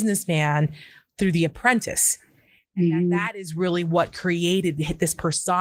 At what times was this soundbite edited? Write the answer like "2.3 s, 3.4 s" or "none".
none